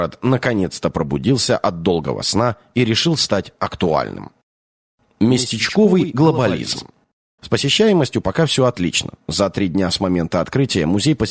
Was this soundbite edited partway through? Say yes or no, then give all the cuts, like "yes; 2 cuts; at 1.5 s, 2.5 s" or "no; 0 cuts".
yes; 2 cuts; at 7.4 s, 9.2 s